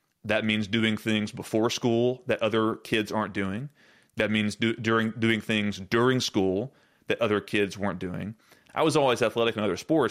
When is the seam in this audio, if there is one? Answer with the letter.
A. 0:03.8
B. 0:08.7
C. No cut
B